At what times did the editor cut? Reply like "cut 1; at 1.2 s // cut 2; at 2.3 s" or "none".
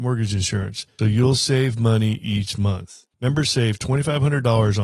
cut 1; at 1.0 s // cut 2; at 3.1 s